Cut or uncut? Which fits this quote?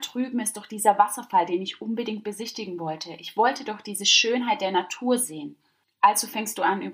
uncut